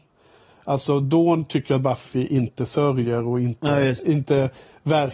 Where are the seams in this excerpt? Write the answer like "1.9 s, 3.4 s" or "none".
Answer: 4.0 s